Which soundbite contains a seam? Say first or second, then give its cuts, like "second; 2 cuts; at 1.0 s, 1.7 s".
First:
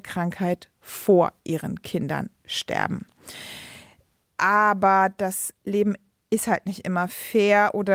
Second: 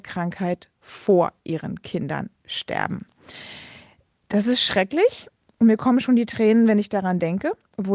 first; 1 cut; at 4.2 s